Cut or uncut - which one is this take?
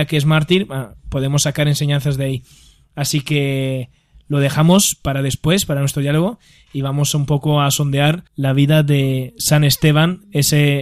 cut